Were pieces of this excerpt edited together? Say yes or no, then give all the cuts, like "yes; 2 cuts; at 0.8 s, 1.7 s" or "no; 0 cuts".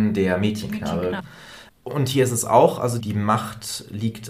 yes; 2 cuts; at 1.2 s, 3.0 s